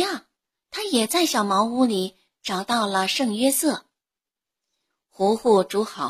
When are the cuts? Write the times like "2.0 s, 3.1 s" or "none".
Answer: none